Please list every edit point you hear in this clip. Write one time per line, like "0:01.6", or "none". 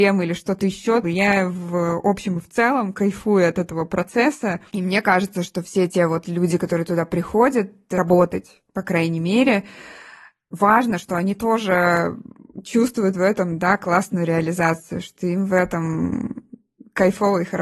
none